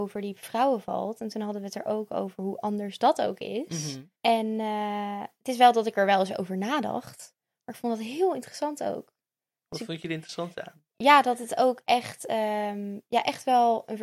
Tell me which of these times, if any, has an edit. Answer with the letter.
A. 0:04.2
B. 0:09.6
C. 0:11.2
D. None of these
A